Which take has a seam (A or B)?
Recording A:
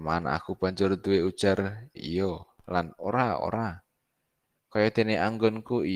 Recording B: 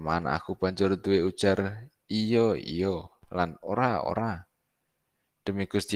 A